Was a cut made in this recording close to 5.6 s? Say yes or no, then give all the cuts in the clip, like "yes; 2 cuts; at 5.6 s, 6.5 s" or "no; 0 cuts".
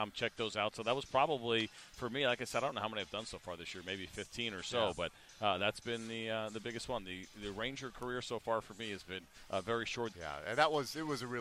no; 1 cut; at 10.1 s